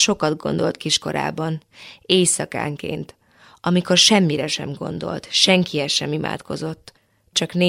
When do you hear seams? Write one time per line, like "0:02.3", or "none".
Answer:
none